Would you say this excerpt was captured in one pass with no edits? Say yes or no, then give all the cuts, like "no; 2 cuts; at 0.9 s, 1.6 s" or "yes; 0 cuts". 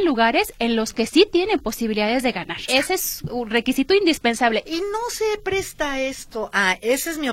no; 2 cuts; at 2.7 s, 4.6 s